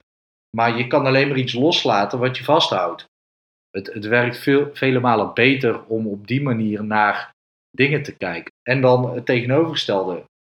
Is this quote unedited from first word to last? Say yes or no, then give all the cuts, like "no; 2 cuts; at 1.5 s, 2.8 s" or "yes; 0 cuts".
no; 2 cuts; at 3.5 s, 8.5 s